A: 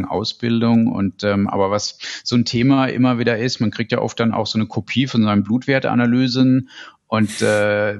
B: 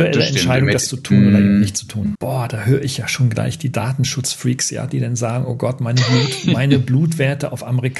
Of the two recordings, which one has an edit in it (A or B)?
B